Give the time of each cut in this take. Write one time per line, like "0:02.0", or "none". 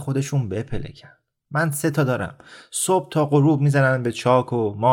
none